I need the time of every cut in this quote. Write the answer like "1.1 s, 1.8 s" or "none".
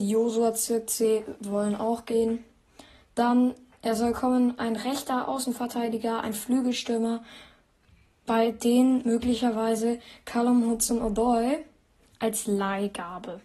none